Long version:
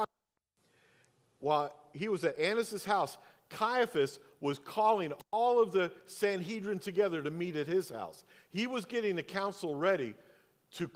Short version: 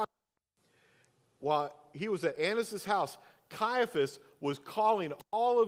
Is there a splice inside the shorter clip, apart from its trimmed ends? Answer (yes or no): no